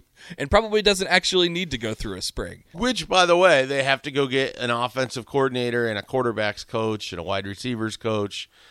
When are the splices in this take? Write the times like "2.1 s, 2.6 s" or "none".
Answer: 2.7 s